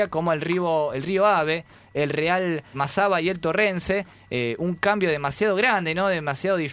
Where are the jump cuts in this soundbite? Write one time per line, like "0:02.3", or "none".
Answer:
0:02.7